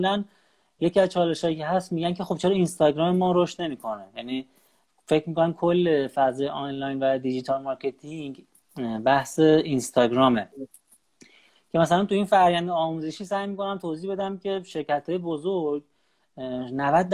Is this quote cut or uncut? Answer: uncut